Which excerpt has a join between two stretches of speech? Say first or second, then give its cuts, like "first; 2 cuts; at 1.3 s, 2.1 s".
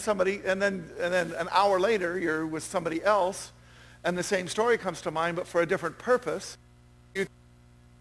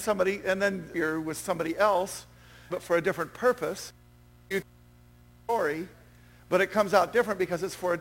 second; 2 cuts; at 0.9 s, 2.7 s